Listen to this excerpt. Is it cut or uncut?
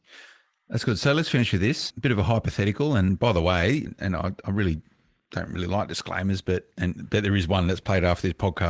uncut